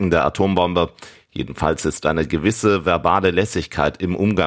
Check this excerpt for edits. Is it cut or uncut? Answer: uncut